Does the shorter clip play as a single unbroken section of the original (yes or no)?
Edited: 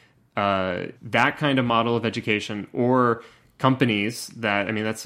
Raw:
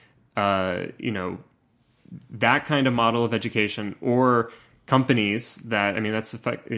no